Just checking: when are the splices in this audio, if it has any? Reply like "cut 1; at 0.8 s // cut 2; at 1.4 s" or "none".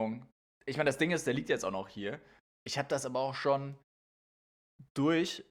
none